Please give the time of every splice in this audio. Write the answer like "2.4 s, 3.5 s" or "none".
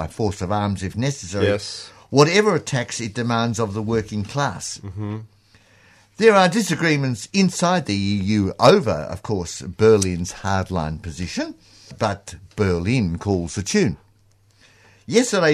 11.9 s